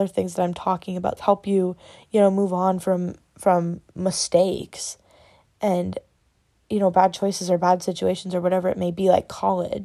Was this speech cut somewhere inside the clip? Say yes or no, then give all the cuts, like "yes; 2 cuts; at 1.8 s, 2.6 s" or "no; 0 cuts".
yes; 1 cut; at 1.2 s